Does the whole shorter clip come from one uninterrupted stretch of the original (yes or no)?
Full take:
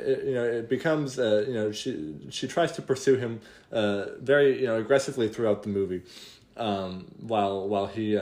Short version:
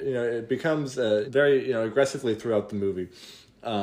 no